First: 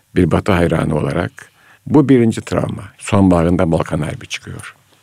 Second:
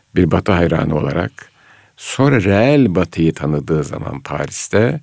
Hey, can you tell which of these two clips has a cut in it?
first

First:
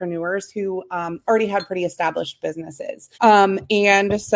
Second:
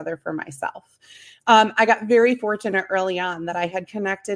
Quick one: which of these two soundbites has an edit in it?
first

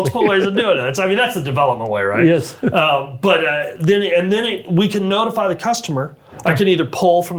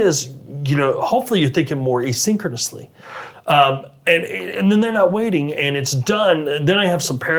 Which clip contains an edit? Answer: second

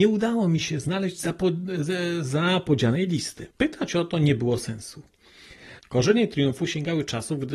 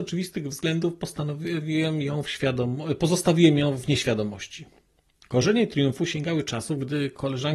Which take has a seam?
first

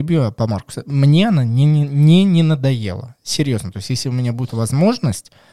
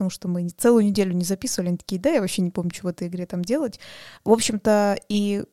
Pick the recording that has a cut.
second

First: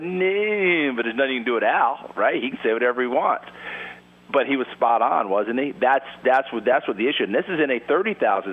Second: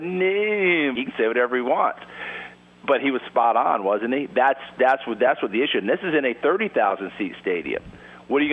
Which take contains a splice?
second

